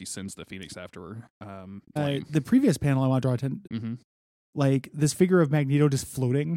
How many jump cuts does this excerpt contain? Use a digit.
2